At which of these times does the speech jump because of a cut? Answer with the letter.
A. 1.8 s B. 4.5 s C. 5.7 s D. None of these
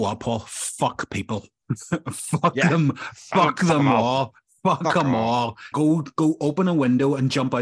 C